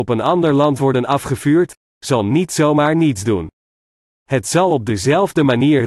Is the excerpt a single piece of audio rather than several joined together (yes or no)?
no